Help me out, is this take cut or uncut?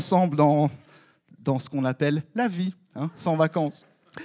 uncut